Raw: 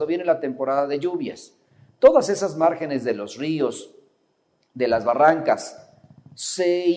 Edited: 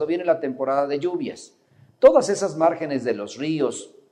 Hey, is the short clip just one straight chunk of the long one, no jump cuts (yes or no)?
yes